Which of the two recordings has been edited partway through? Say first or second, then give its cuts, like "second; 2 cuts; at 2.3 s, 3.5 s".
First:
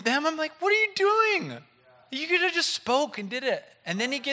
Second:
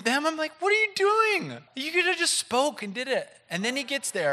second; 1 cut; at 1.7 s